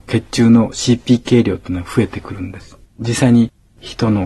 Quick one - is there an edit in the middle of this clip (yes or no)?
yes